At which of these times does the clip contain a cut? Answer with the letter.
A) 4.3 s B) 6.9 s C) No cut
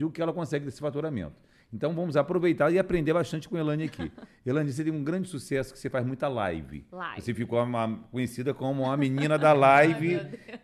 C